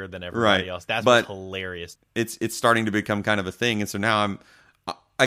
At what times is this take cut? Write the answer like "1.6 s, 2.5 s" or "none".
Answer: 2.0 s

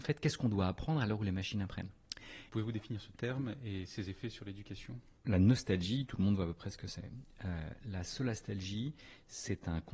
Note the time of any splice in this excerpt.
2.5 s

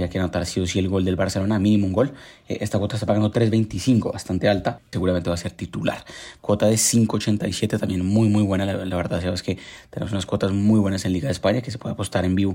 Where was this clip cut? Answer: 4.9 s, 6.4 s

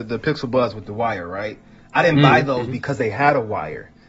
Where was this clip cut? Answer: none

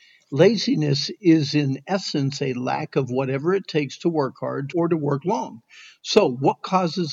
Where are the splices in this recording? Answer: 4.7 s

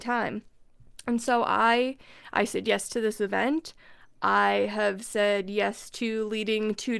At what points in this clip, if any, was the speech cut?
none

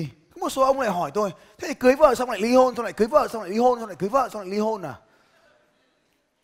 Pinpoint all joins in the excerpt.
none

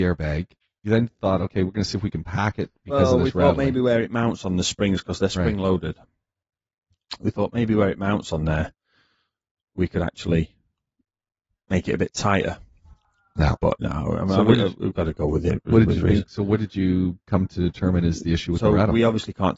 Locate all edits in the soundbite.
none

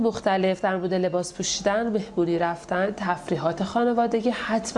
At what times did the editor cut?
none

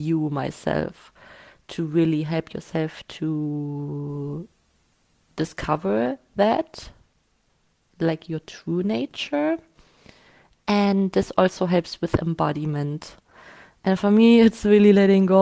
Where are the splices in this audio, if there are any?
none

